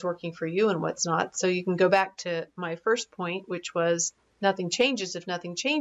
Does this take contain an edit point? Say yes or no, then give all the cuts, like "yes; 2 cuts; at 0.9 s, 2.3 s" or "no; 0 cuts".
no; 0 cuts